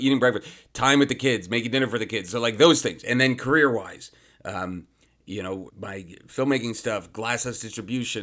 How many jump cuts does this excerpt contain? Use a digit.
1